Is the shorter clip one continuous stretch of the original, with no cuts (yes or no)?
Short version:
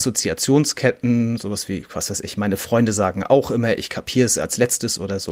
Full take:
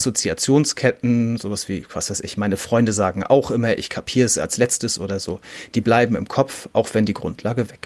yes